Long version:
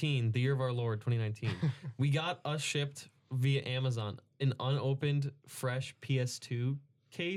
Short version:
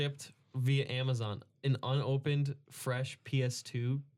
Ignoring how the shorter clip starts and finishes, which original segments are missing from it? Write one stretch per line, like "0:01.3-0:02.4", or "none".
none